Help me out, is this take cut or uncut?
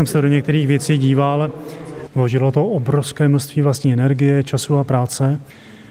cut